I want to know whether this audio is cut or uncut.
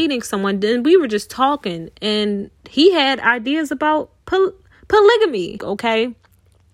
cut